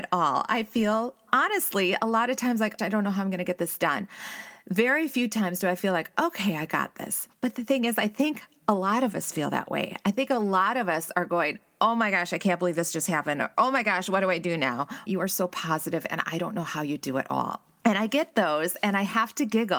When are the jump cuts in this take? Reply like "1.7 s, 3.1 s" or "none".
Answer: 2.8 s, 15.1 s